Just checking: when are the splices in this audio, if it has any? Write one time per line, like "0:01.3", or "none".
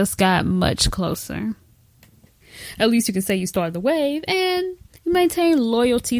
0:02.3